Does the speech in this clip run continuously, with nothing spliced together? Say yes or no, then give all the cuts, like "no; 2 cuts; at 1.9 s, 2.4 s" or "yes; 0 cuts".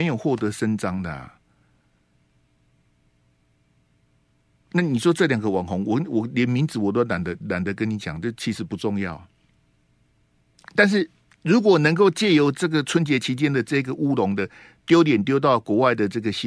yes; 0 cuts